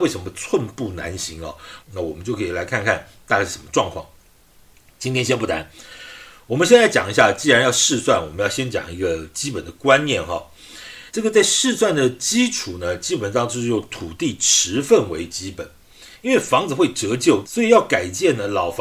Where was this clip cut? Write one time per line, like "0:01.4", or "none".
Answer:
0:01.8
0:11.1
0:17.4